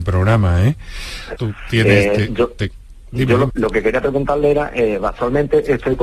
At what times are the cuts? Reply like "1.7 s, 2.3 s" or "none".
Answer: 1.3 s, 3.5 s

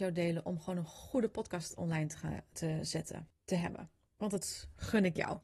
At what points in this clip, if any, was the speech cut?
none

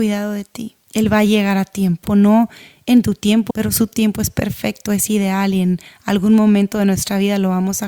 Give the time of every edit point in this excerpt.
2.1 s, 3.5 s

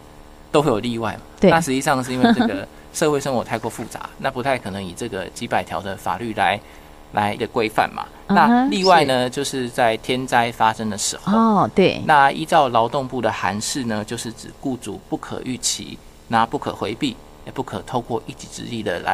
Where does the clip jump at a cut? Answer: 7.4 s

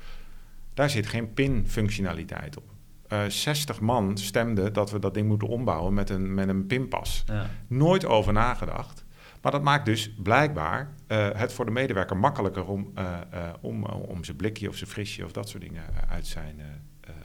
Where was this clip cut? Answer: none

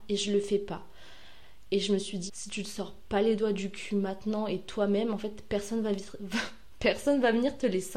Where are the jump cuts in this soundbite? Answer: 2.3 s

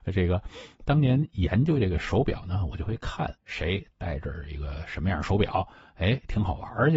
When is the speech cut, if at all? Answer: 3.3 s

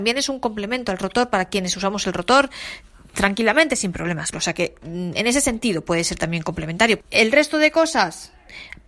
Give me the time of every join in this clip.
4.3 s, 7.0 s

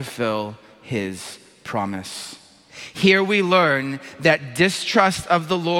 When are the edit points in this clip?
none

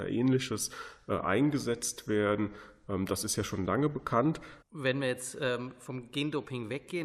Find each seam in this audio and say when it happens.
4.6 s

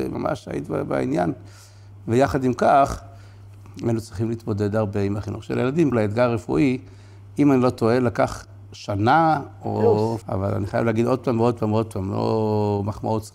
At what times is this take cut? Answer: 5.9 s, 10.2 s

